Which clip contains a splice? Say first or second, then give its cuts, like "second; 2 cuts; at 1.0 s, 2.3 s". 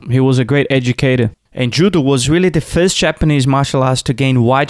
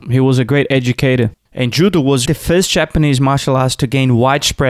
second; 1 cut; at 2.3 s